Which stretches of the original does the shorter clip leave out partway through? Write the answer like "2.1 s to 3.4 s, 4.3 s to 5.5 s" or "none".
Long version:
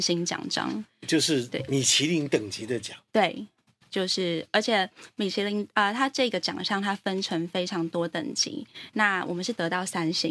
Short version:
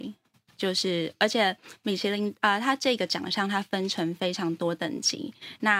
none